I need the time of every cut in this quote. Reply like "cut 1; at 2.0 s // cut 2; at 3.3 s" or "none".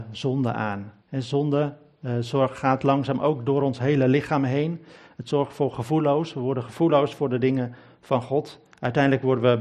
cut 1; at 1.0 s